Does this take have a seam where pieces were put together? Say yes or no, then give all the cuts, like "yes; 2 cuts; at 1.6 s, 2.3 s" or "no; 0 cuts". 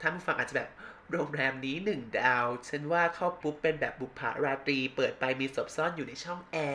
yes; 1 cut; at 3.4 s